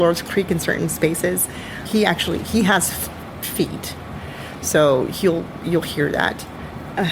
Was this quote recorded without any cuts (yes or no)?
no